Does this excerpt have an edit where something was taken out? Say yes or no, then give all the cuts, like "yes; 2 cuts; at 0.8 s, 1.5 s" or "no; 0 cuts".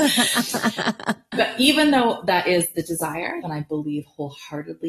yes; 1 cut; at 3.4 s